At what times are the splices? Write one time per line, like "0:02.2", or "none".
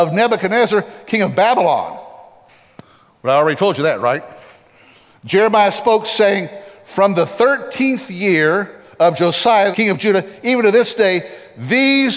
0:09.7